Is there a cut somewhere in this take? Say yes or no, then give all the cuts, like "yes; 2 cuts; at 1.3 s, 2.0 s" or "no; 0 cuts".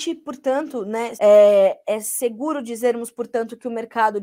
yes; 1 cut; at 1.2 s